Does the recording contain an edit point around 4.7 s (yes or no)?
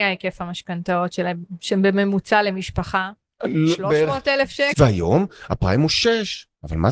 yes